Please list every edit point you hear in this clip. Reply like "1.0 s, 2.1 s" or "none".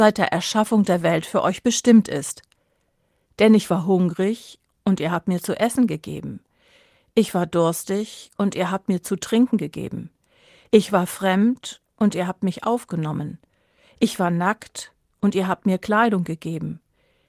none